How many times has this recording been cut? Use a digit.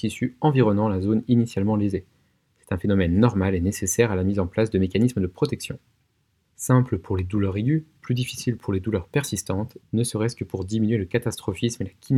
2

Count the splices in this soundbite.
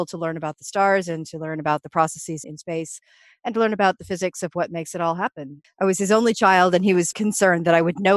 3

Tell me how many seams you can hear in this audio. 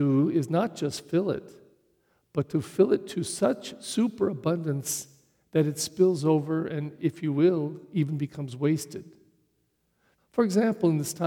1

